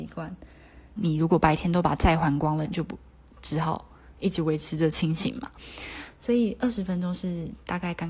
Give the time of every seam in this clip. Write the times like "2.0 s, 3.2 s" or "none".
1.0 s, 2.6 s